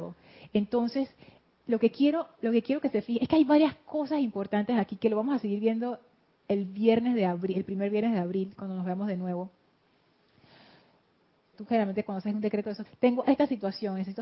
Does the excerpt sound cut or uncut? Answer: cut